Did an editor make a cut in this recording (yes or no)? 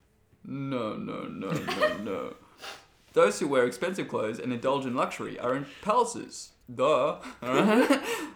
yes